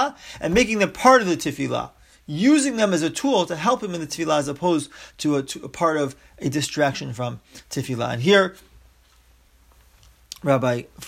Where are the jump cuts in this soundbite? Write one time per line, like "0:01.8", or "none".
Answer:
none